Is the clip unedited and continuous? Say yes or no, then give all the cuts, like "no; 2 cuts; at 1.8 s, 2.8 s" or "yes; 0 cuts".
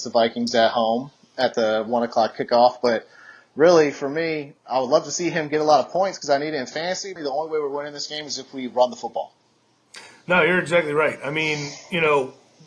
no; 1 cut; at 7.2 s